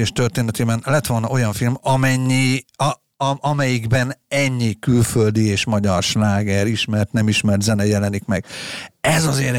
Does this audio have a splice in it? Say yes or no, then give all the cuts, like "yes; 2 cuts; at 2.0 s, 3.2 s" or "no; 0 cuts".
no; 0 cuts